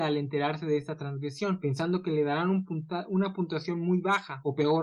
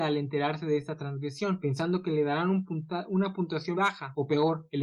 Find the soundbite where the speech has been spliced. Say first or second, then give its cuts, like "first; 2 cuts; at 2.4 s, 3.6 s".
second; 1 cut; at 3.7 s